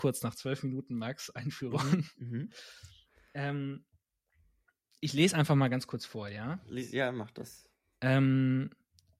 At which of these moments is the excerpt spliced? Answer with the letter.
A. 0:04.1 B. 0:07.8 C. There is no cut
C